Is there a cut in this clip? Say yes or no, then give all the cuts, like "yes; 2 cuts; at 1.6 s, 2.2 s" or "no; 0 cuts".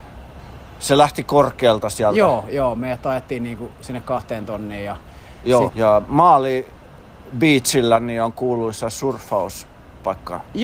yes; 1 cut; at 5.7 s